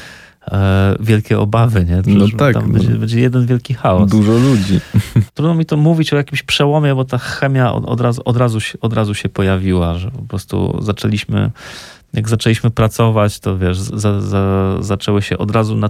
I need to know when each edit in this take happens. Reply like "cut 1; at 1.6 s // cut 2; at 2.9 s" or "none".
cut 1; at 2.0 s // cut 2; at 5.3 s